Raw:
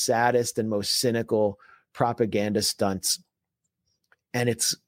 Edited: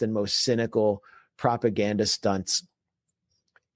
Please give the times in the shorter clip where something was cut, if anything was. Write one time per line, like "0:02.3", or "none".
none